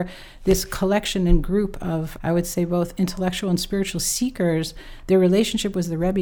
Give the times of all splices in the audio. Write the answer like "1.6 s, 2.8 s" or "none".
2.2 s